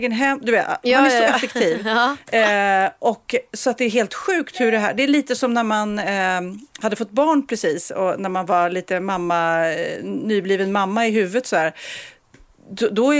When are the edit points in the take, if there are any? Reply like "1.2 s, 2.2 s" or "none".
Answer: none